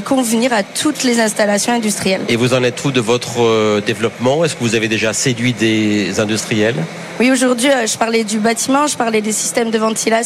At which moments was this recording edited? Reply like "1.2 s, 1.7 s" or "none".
none